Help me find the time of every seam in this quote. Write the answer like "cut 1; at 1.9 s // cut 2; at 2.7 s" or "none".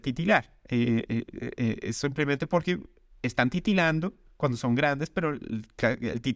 none